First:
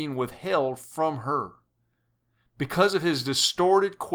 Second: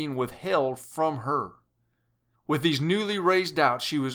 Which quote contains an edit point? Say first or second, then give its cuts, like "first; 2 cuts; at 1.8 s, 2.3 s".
second; 1 cut; at 2.3 s